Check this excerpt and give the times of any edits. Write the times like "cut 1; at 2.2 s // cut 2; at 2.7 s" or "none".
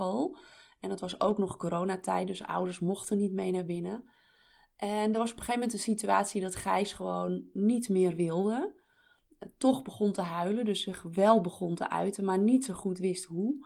none